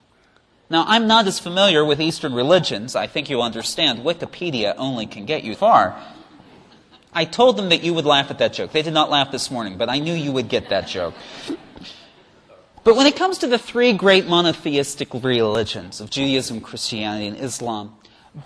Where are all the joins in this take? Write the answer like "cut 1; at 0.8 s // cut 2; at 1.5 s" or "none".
cut 1; at 5.5 s